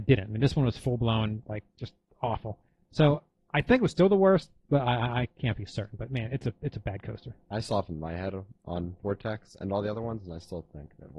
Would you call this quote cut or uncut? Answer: uncut